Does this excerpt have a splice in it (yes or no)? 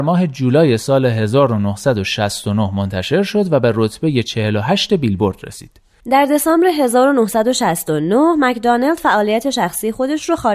yes